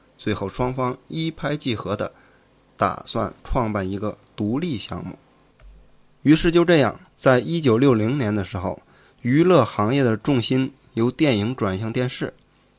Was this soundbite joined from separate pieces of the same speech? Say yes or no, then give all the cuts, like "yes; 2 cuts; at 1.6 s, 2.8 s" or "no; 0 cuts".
no; 0 cuts